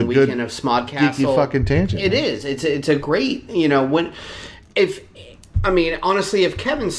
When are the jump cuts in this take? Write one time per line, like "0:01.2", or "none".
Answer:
none